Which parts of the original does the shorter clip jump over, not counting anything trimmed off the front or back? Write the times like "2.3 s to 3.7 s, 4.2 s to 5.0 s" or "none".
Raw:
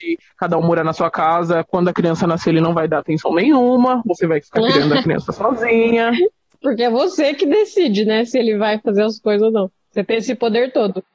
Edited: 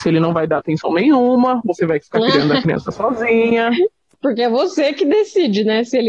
none